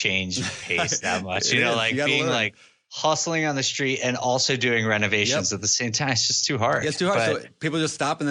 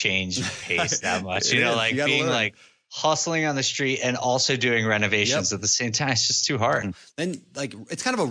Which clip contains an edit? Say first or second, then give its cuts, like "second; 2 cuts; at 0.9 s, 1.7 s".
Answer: second; 1 cut; at 6.8 s